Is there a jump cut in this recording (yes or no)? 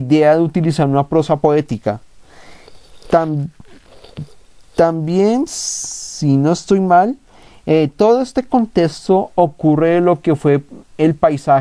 no